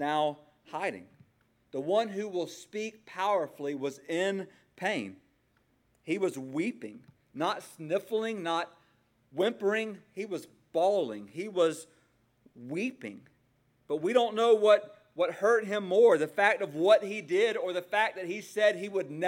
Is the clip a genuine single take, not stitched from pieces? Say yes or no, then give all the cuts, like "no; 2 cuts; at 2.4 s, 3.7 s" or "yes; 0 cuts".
yes; 0 cuts